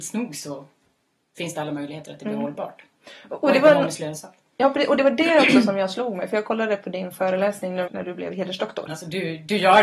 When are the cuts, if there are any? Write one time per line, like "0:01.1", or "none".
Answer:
0:07.9
0:08.9